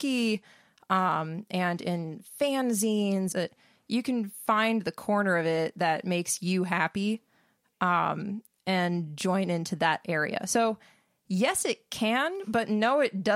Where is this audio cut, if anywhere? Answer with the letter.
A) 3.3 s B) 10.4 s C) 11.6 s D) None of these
A